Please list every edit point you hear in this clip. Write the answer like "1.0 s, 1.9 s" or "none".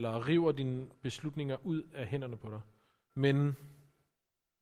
3.1 s